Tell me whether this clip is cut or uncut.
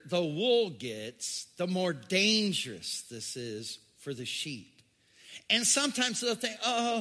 uncut